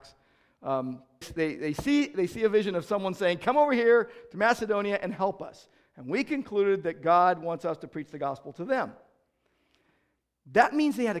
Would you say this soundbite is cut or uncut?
cut